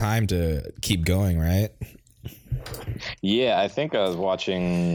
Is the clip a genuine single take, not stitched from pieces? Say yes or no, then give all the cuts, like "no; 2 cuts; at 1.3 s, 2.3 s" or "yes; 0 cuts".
yes; 0 cuts